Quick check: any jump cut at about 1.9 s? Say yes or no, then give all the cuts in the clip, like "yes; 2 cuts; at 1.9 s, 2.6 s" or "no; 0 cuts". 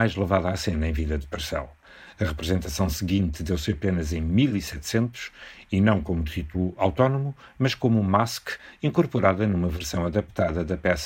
no; 0 cuts